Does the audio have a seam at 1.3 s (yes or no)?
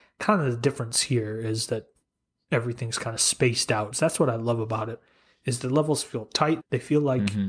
no